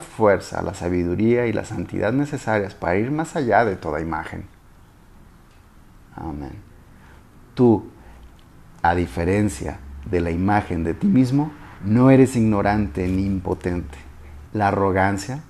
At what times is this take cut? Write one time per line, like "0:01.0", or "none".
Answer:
0:11.8
0:14.5